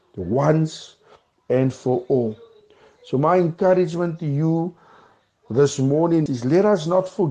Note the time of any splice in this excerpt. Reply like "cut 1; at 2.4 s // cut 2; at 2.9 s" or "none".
cut 1; at 6.3 s